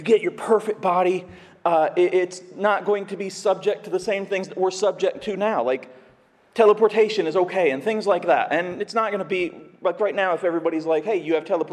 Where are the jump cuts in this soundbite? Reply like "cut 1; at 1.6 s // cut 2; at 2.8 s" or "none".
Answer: none